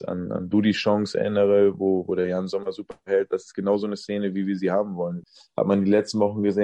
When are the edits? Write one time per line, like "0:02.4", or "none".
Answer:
none